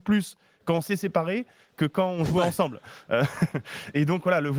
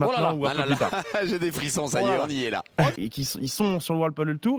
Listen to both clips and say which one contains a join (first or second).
second